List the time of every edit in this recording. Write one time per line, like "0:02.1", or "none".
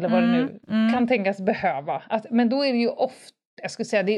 none